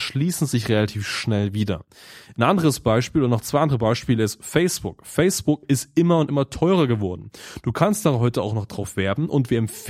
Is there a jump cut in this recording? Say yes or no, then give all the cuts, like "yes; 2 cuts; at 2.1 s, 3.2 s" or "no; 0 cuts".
no; 0 cuts